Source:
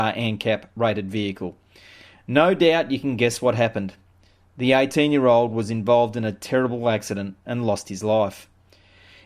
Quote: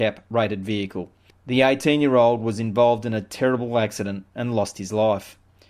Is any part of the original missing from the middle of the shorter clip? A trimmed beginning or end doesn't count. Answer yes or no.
yes